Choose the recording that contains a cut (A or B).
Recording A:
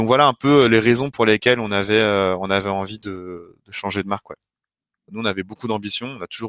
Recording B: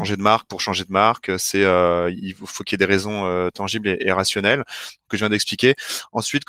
A